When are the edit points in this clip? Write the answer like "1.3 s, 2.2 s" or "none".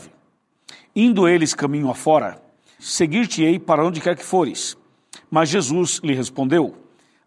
2.8 s